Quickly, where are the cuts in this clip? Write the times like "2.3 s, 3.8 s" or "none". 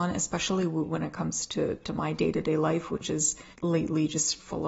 3.5 s